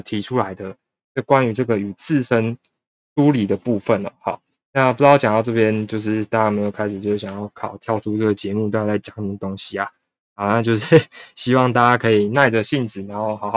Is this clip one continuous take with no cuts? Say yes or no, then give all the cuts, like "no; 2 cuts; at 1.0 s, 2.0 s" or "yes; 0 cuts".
yes; 0 cuts